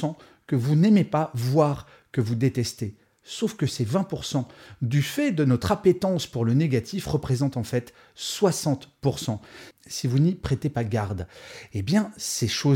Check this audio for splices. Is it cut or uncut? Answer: uncut